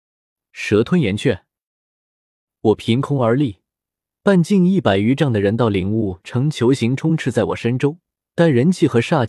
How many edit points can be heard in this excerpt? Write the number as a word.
one